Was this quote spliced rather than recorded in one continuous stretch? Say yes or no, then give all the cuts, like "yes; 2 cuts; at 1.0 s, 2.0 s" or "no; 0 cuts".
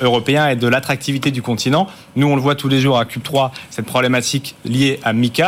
no; 0 cuts